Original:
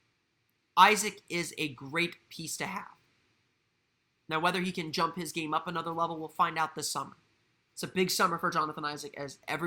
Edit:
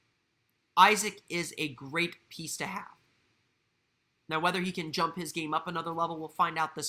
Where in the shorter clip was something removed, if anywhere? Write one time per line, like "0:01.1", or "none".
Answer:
none